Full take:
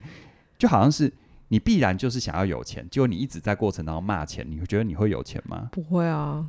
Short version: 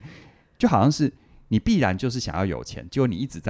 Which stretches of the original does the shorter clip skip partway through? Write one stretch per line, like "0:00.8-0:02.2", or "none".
none